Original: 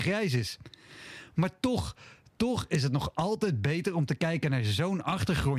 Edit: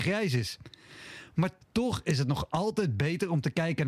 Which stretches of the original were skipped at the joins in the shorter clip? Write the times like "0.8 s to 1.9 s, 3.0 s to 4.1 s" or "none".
1.6 s to 2.3 s